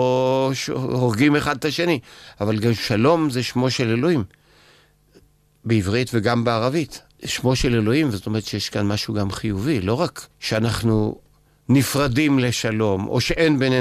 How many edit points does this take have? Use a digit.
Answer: 2